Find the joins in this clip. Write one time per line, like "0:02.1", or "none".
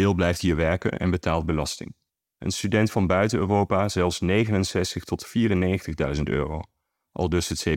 0:02.2